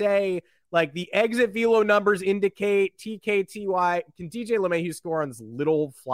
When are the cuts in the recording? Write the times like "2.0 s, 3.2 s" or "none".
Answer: none

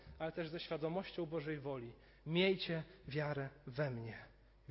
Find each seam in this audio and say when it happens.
none

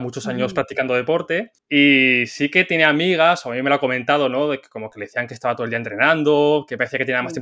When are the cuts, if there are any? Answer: 1.6 s

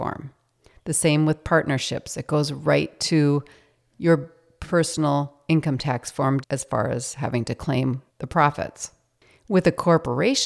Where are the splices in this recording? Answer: 6.4 s, 8.1 s

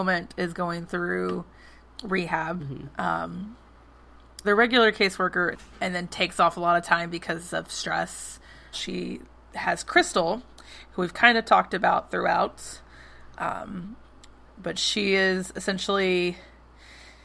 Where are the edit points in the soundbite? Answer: 4.4 s, 5.5 s, 8.7 s

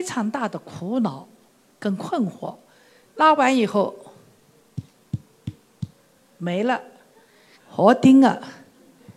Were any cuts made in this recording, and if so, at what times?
3.0 s, 7.6 s

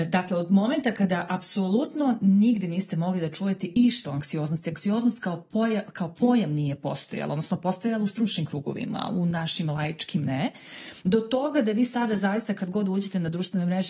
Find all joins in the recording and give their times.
none

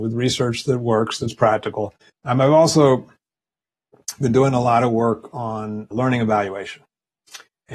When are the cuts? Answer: 2.1 s, 5.9 s

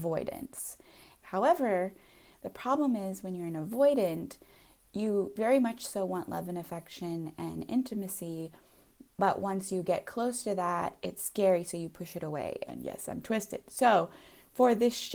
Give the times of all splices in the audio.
1.2 s, 12.7 s

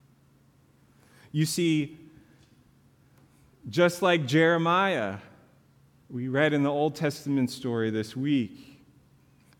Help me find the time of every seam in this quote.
none

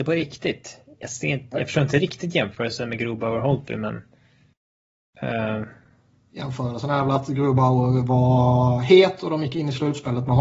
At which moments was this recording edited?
none

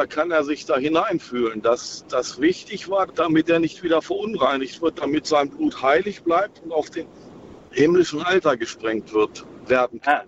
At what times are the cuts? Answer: 3.1 s

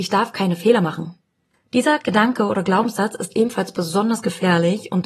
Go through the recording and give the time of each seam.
none

